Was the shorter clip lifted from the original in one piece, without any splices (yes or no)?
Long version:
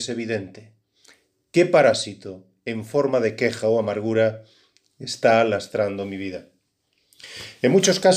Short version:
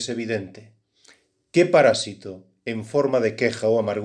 yes